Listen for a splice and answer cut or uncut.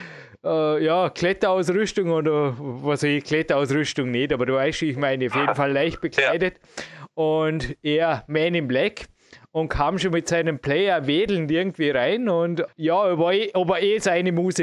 uncut